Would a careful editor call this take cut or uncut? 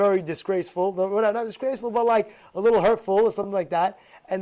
uncut